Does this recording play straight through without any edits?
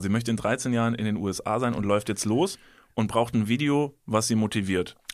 yes; 0 cuts

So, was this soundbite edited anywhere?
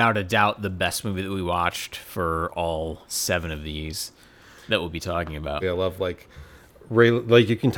yes; 1 cut; at 5.6 s

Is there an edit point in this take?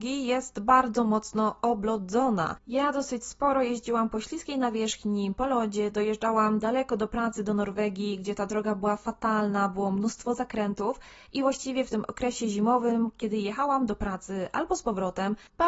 no; 0 cuts

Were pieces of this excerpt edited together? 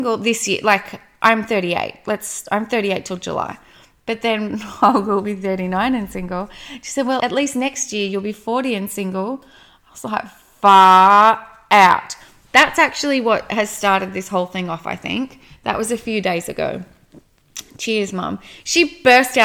yes; 1 cut; at 7.2 s

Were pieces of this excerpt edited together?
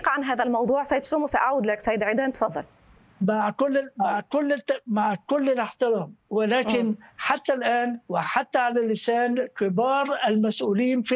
no; 0 cuts

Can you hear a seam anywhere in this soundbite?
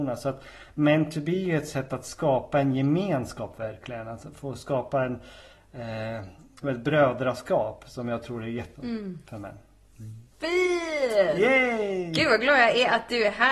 yes; 2 cuts; at 6.6 s, 8.7 s

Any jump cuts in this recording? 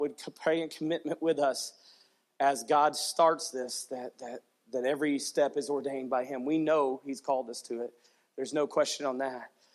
no; 0 cuts

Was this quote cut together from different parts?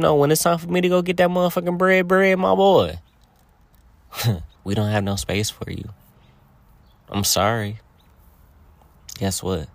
yes; 1 cut; at 4.6 s

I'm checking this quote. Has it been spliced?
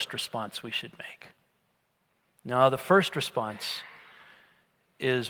no; 0 cuts

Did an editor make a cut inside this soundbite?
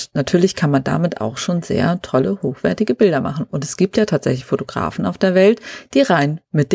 no; 0 cuts

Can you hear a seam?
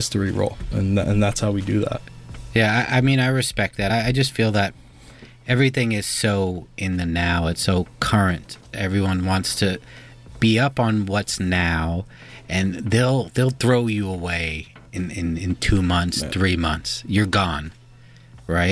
no; 0 cuts

